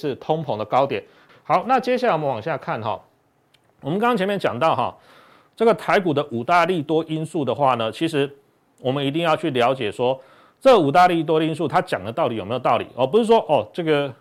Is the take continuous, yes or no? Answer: no